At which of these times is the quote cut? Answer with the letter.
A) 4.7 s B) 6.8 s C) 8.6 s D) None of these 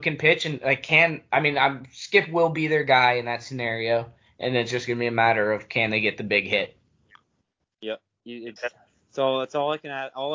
C